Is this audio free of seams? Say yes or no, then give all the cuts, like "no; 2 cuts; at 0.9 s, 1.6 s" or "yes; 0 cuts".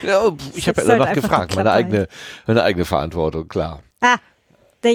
no; 1 cut; at 3.9 s